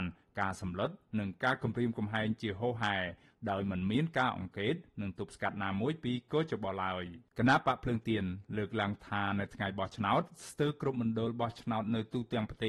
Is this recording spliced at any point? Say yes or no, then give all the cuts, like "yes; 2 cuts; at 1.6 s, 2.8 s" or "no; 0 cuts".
yes; 1 cut; at 7.3 s